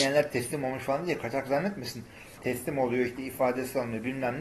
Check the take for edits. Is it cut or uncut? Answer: cut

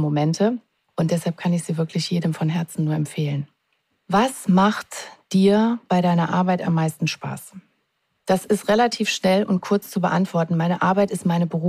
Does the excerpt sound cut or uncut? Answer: uncut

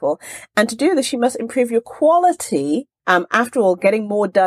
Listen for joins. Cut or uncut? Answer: cut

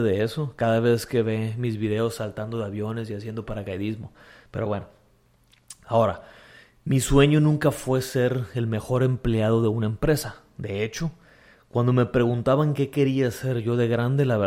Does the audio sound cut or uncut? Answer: uncut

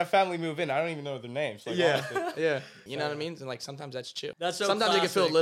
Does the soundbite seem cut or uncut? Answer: cut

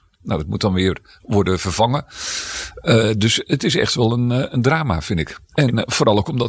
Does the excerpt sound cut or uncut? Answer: uncut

